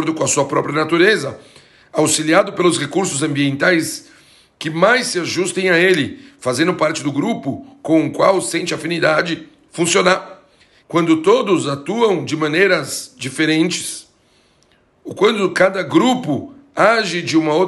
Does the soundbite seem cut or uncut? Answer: cut